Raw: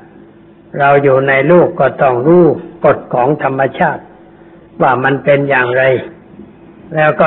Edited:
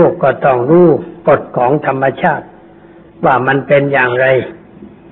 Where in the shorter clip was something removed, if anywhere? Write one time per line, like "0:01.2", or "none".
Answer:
none